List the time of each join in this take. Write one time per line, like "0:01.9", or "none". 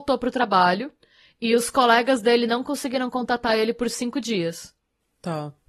none